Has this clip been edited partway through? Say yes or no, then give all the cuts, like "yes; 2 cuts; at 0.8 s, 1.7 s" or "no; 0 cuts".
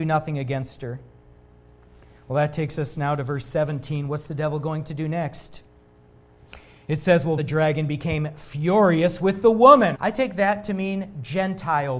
yes; 2 cuts; at 7.4 s, 9.9 s